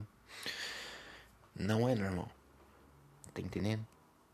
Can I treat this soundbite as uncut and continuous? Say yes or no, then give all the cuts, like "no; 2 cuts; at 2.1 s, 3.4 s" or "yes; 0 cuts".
no; 1 cut; at 1.5 s